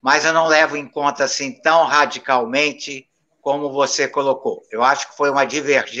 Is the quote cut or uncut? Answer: uncut